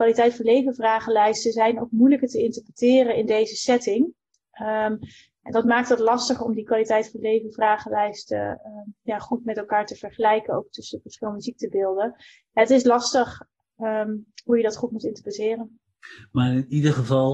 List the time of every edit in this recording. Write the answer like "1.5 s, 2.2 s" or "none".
none